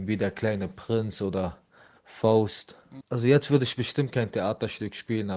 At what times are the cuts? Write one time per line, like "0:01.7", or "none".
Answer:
0:03.0

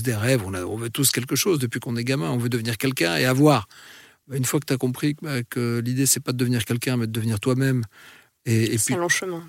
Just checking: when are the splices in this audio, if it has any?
none

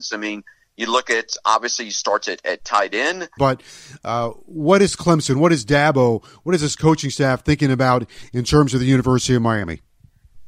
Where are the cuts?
0:03.4

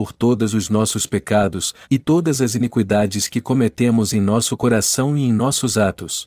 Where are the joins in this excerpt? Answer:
0:01.8

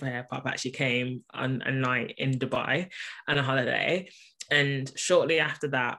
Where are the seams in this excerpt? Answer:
none

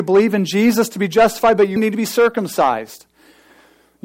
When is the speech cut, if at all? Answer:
0:01.8

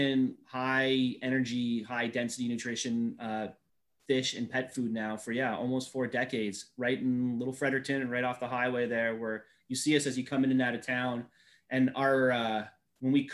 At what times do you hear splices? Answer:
none

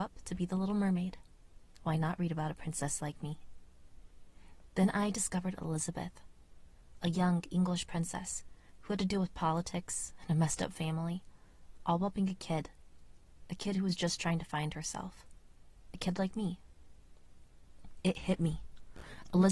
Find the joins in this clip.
none

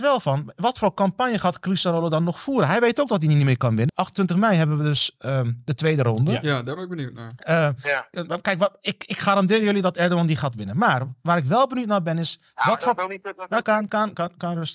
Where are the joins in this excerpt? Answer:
0:03.9
0:13.6

